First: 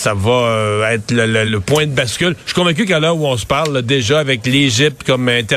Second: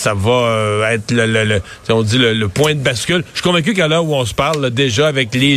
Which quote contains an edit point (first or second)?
first